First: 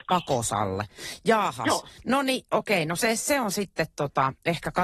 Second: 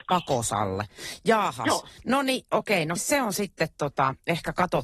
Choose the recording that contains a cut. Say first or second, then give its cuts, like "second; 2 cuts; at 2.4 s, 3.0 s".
second; 1 cut; at 3.0 s